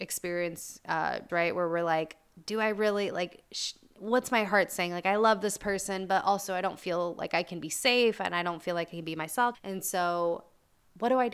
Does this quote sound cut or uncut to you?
cut